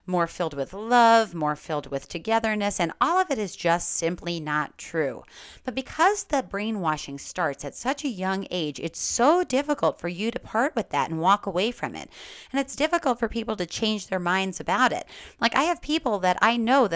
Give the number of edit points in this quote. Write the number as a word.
zero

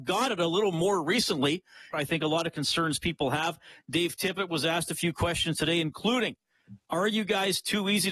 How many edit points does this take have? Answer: one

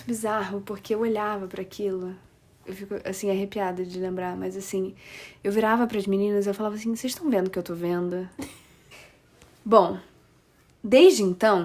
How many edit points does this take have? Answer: zero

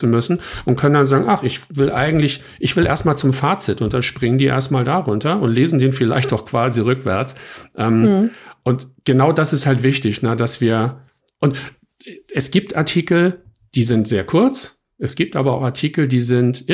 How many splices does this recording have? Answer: zero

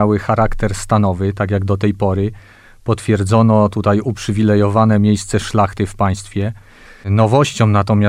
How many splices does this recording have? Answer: one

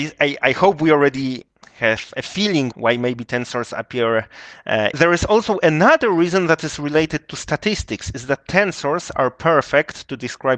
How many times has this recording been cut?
two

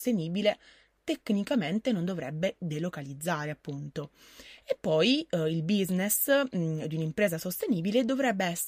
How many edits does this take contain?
zero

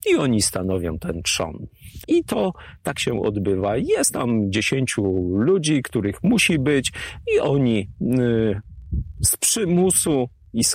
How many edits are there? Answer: one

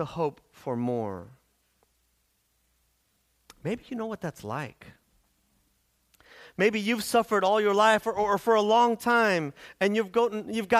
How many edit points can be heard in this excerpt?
zero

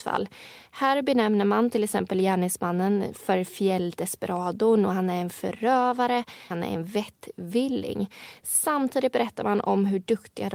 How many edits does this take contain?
one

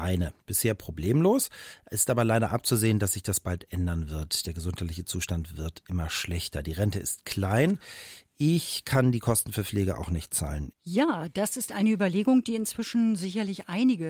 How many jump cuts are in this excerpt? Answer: one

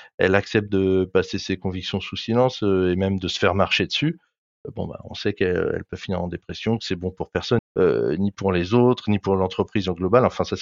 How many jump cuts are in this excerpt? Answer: one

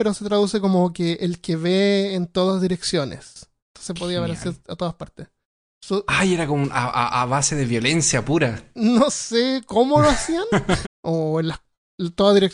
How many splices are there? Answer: three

